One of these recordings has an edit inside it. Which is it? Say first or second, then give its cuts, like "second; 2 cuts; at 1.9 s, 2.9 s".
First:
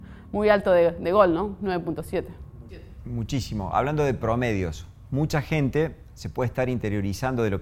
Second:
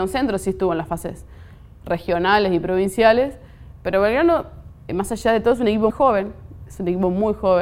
second; 2 cuts; at 4.9 s, 5.9 s